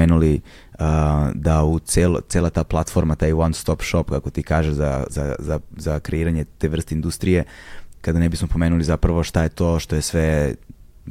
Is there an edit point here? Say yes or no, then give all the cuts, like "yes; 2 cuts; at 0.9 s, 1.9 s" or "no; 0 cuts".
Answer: yes; 2 cuts; at 5.1 s, 7.9 s